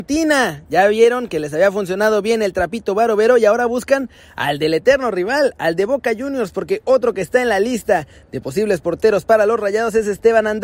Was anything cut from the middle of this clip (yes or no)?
no